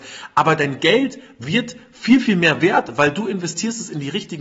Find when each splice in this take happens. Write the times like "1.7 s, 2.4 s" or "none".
none

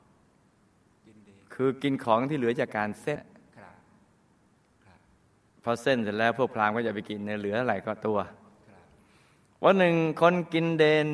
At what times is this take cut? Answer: 3.2 s

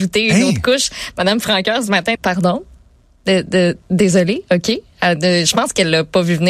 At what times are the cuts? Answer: 2.2 s

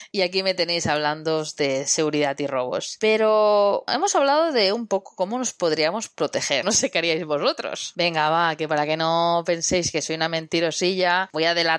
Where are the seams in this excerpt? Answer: 3.9 s, 6.6 s

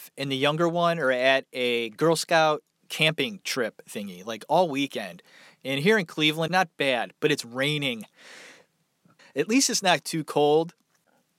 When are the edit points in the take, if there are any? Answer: 6.5 s, 9.2 s

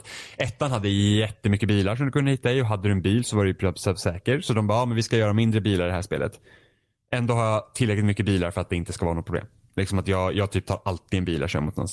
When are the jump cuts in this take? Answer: none

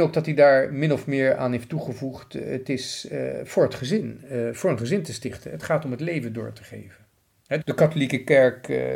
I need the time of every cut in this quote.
7.6 s

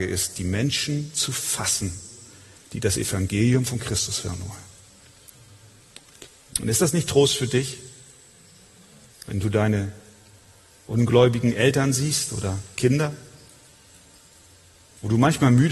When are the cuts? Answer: 6.5 s, 9.1 s

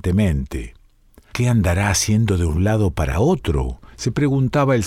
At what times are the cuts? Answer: 1.3 s

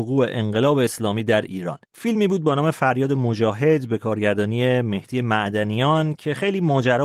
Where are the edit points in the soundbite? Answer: 1.8 s

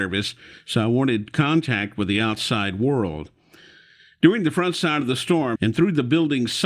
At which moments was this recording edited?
5.5 s

